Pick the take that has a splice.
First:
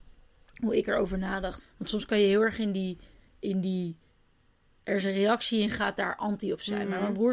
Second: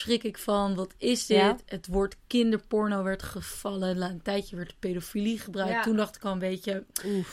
first; 1 cut; at 1.6 s

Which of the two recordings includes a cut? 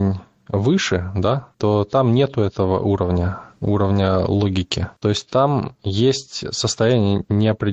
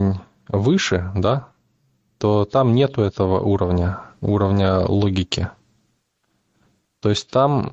first; 2 cuts; at 1.5 s, 5.0 s

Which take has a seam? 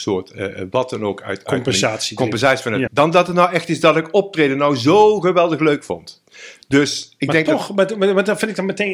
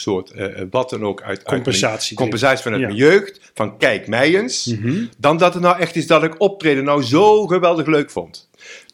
first; 1 cut; at 2.9 s

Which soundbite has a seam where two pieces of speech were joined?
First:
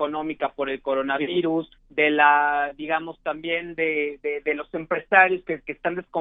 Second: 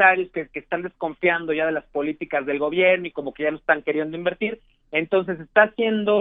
first; 1 cut; at 1.8 s

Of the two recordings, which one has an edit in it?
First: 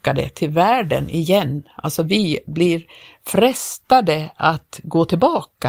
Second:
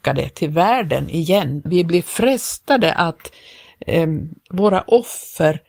second; 1 cut; at 1.7 s

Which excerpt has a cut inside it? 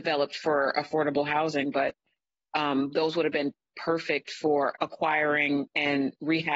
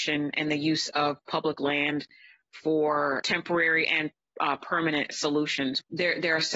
first; 1 cut; at 4.8 s

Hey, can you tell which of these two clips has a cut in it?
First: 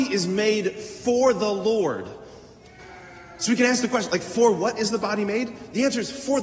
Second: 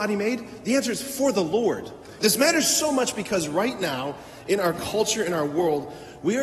second; 1 cut; at 2.2 s

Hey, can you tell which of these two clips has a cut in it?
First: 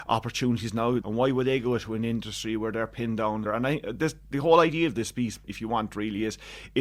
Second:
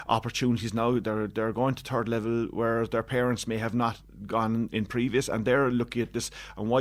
first; 3 cuts; at 1.0 s, 3.5 s, 5.4 s

